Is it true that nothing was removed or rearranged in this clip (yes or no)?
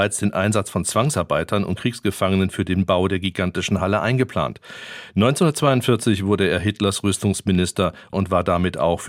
yes